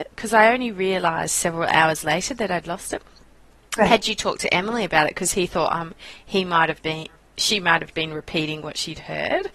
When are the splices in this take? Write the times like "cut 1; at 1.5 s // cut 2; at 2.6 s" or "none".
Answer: cut 1; at 6.8 s // cut 2; at 7.9 s